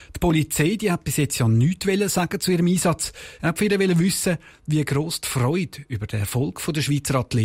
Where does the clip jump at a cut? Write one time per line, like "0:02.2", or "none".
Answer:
0:03.4